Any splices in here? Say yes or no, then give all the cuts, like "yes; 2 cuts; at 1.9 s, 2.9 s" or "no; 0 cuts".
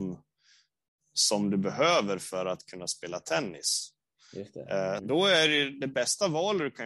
yes; 1 cut; at 5.0 s